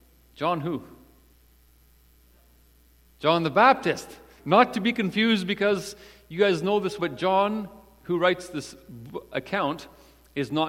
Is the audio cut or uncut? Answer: cut